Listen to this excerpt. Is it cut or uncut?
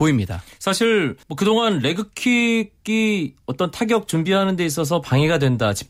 cut